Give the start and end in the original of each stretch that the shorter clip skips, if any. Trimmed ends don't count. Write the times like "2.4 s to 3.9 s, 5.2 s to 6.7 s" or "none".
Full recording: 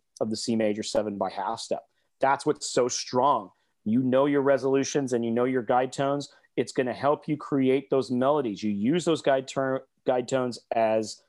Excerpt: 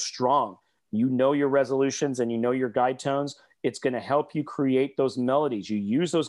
none